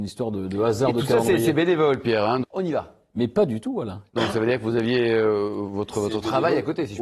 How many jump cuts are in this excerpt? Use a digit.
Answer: 2